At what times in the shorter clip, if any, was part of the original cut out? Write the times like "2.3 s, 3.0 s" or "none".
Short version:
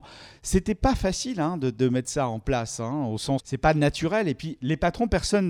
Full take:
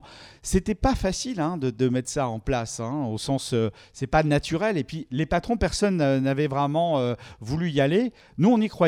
3.4 s